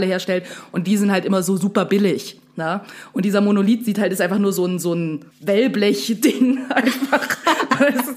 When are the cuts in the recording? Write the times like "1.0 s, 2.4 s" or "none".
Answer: 5.3 s